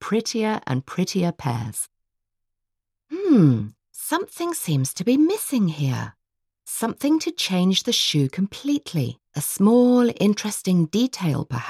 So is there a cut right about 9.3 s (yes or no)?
yes